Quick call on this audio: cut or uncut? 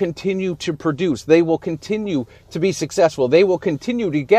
uncut